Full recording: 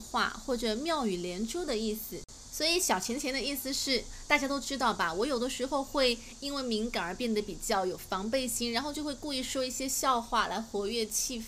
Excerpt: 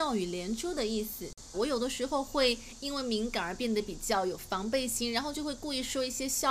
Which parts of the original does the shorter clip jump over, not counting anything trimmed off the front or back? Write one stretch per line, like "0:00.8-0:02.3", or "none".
0:02.4-0:05.1